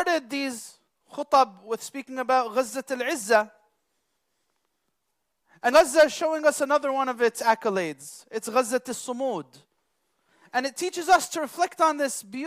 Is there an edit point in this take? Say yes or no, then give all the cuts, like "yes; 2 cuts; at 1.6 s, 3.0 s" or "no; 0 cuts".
yes; 1 cut; at 5.7 s